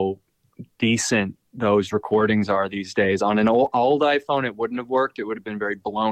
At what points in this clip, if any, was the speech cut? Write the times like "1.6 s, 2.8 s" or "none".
none